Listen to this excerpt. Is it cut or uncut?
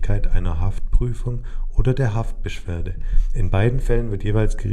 uncut